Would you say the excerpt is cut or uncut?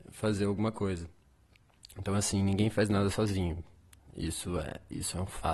uncut